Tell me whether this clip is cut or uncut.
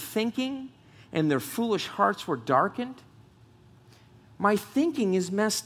uncut